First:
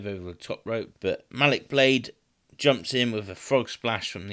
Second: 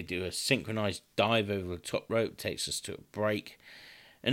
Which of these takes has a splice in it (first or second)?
first